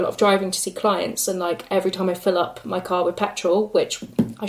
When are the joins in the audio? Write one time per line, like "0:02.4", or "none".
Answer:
none